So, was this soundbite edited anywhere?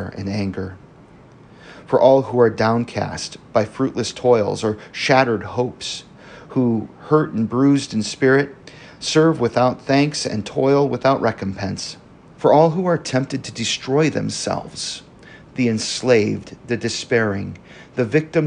yes; 1 cut; at 12.3 s

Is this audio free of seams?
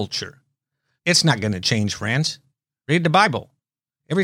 no; 1 cut; at 1.0 s

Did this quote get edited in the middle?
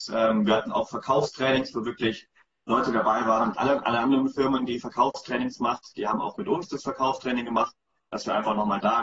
yes; 1 cut; at 3.5 s

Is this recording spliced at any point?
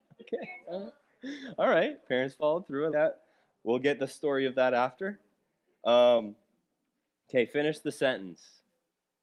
yes; 1 cut; at 2.9 s

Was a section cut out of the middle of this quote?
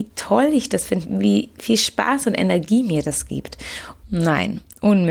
yes; 2 cuts; at 1.0 s, 4.0 s

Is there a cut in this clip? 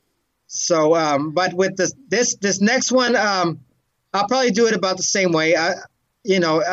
no; 0 cuts

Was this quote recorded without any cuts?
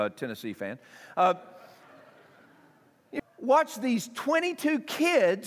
no; 1 cut; at 3.2 s

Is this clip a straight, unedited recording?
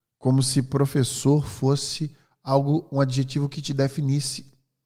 yes; 0 cuts

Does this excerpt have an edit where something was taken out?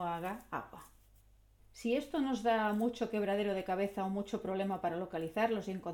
yes; 1 cut; at 1.6 s

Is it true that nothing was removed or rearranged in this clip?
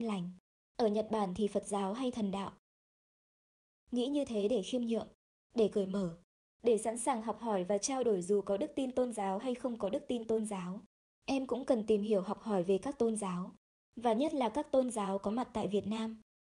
yes; 0 cuts

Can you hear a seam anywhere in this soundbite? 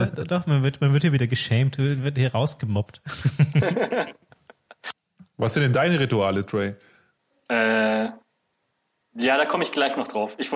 no; 0 cuts

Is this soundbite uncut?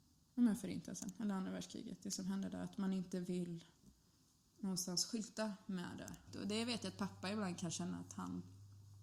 no; 1 cut; at 6.3 s

